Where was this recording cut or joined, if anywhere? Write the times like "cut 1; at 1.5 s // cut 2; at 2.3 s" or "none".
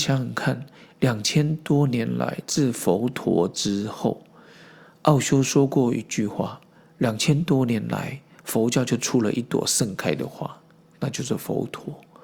none